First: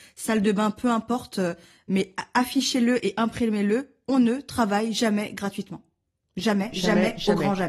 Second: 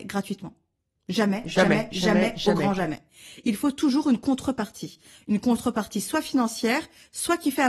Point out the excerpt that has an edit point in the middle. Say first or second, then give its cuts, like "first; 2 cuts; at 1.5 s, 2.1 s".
first; 1 cut; at 6.7 s